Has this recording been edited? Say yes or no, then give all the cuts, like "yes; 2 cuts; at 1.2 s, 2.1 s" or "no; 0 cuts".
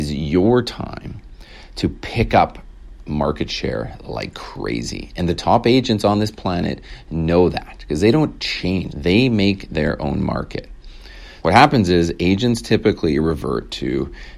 yes; 2 cuts; at 8.9 s, 11.4 s